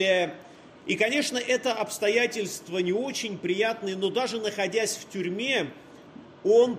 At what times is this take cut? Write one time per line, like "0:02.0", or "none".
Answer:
none